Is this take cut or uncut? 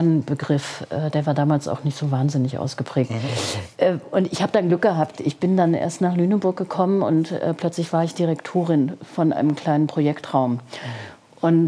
uncut